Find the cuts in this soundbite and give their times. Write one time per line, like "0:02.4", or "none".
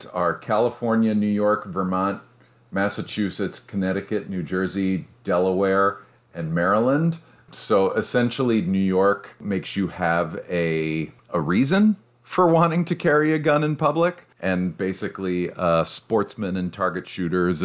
none